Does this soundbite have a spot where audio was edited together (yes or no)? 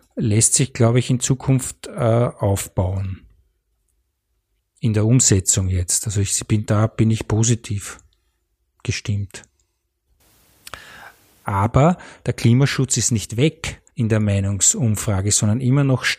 yes